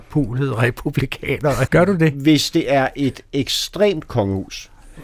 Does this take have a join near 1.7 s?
yes; 1 cut; at 1.7 s

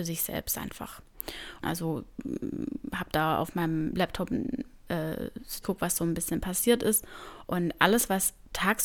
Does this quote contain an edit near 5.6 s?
yes; 3 cuts; at 1.6 s, 5.6 s, 7.5 s

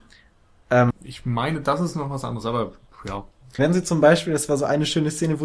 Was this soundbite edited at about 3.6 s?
yes; 2 cuts; at 0.9 s, 3.6 s

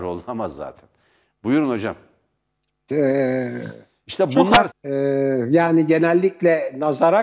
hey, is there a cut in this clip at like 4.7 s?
yes; 2 cuts; at 2.9 s, 4.7 s

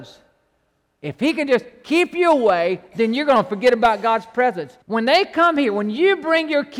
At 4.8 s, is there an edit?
yes; 1 cut; at 4.8 s

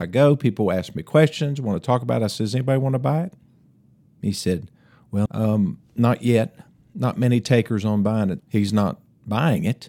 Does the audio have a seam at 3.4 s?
no; 2 cuts; at 5.3 s, 8.4 s

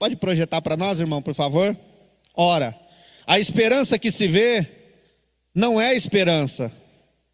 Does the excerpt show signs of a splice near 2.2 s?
yes; 1 cut; at 2.2 s

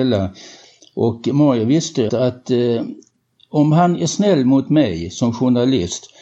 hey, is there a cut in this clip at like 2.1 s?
yes; 1 cut; at 2.1 s

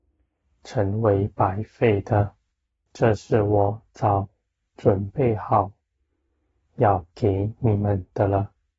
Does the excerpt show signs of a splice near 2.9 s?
yes; 1 cut; at 2.9 s

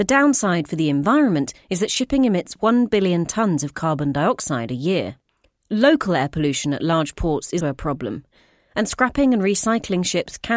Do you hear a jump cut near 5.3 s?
no; 1 cut; at 7.6 s

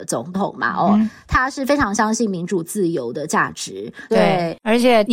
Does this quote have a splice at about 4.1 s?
yes; 1 cut; at 4.1 s

